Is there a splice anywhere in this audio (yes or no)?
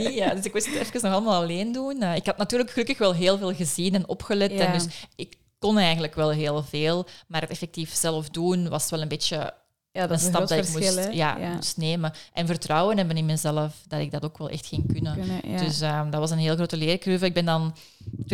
no